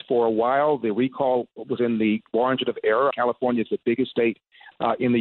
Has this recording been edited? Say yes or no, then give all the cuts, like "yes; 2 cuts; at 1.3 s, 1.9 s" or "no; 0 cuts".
yes; 1 cut; at 3.1 s